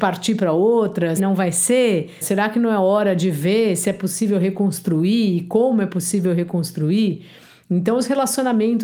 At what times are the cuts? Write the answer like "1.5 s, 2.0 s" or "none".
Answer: 1.2 s, 2.2 s